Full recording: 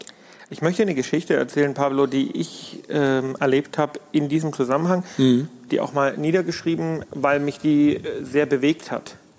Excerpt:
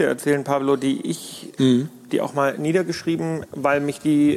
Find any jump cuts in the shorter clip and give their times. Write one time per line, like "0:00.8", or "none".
0:01.6